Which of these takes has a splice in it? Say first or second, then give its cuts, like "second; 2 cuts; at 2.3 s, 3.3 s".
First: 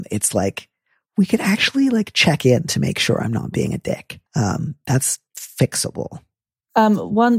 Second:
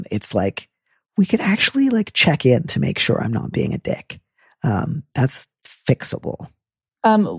first; 1 cut; at 4.3 s